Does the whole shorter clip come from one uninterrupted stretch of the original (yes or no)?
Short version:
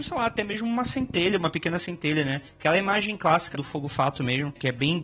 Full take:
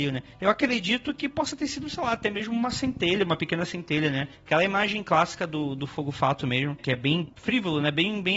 no